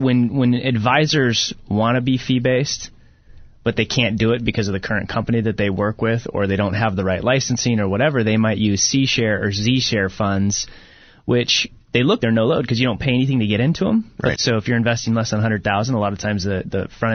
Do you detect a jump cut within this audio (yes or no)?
yes